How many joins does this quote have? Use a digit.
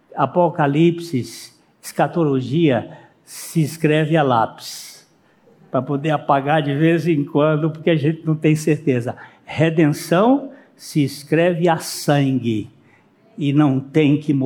0